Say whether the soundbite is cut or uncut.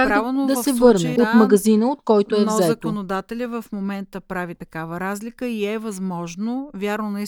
cut